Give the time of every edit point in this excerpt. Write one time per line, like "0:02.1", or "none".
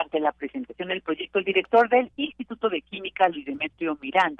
none